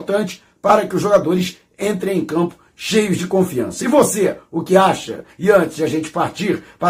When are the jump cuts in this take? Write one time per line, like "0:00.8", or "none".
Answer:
0:05.3